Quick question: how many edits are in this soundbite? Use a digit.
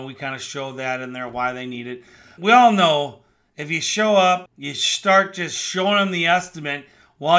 2